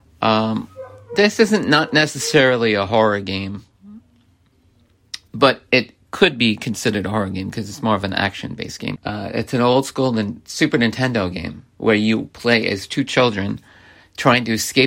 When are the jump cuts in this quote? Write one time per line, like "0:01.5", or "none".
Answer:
0:09.0